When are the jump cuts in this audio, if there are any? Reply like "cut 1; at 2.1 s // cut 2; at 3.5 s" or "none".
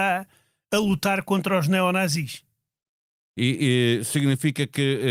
none

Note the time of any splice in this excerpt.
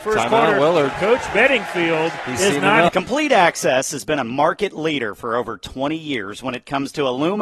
cut 1; at 2.9 s

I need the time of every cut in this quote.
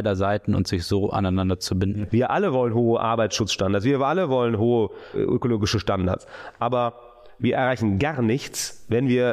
cut 1; at 2.1 s

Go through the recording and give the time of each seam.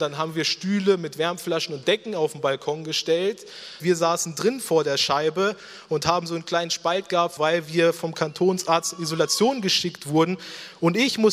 cut 1; at 3.8 s // cut 2; at 7.4 s

